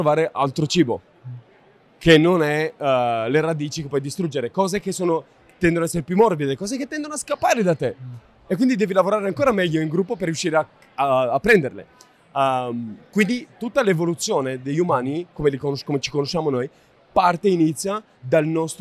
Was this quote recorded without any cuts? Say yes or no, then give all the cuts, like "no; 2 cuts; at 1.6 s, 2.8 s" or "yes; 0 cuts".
yes; 0 cuts